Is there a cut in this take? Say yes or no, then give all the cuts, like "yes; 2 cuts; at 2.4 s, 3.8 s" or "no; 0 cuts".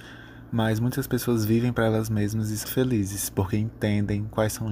yes; 1 cut; at 2.6 s